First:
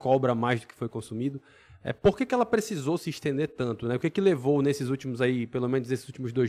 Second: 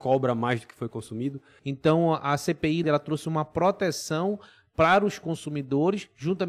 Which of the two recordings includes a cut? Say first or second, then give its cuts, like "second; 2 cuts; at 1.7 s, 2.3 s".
second; 2 cuts; at 1.6 s, 2.8 s